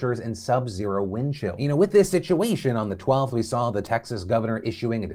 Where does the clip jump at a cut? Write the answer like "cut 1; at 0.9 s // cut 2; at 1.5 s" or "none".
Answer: none